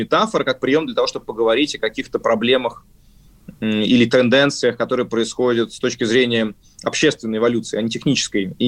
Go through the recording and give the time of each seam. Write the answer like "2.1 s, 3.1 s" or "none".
none

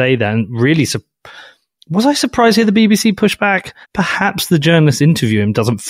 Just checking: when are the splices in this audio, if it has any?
3.8 s

